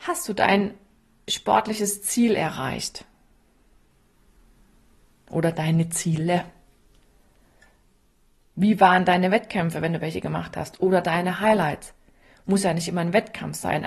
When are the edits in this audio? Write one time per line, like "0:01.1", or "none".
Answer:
none